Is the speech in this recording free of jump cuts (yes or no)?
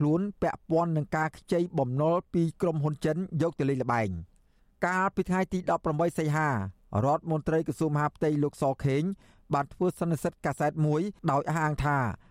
no